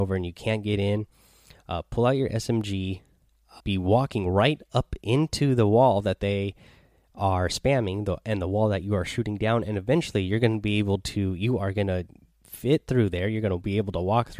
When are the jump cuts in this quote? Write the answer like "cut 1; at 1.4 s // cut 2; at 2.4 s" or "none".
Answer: cut 1; at 3.6 s